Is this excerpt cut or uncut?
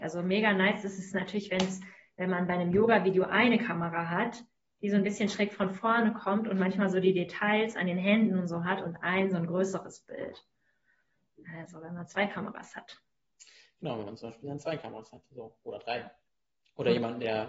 uncut